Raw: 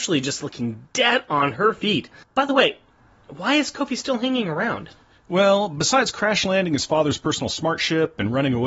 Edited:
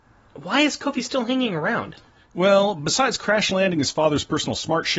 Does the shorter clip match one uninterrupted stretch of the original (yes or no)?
yes